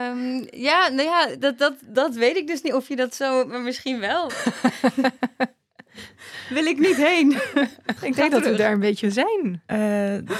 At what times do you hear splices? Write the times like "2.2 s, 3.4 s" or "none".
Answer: 4.3 s, 8.0 s